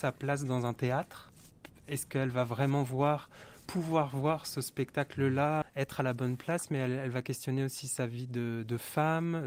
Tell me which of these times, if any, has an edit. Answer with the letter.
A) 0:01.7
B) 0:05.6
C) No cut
B